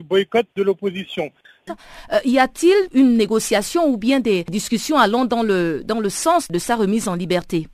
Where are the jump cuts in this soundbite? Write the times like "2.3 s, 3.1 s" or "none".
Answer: 1.7 s